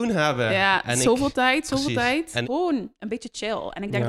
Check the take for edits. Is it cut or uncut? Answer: cut